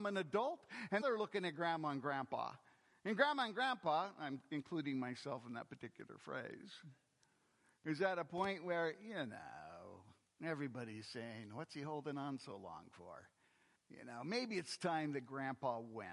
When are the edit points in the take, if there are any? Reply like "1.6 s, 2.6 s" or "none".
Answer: 1.0 s, 13.7 s